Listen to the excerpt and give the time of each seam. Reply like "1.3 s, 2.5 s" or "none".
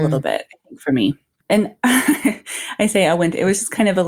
1.4 s